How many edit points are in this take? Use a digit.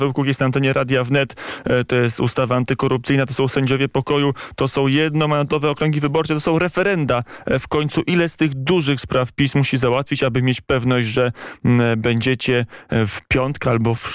0